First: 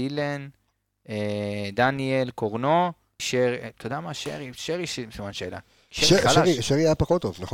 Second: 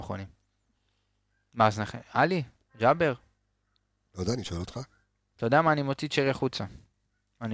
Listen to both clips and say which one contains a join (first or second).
first